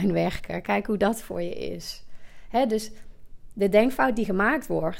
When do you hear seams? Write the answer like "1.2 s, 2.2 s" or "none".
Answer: none